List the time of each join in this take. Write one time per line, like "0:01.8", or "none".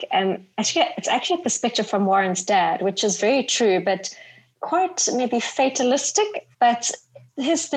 0:06.5